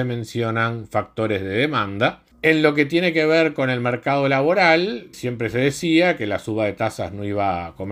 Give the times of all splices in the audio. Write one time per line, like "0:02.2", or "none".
0:02.3
0:05.1